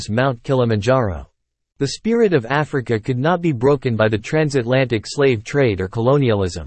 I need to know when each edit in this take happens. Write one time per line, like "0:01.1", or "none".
0:01.7